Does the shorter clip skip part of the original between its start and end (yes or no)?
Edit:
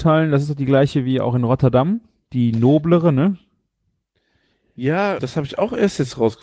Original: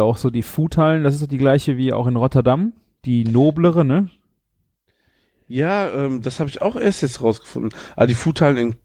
yes